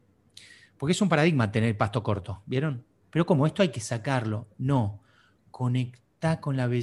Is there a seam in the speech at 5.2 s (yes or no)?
no